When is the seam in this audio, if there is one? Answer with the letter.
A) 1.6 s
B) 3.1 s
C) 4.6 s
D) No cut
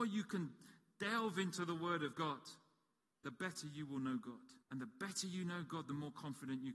C